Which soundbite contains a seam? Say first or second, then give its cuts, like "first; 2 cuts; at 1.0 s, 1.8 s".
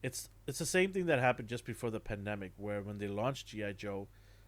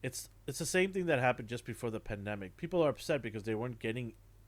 second; 1 cut; at 2.5 s